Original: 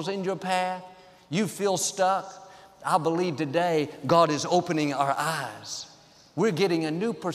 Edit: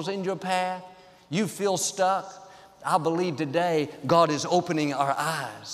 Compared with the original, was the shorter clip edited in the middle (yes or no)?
no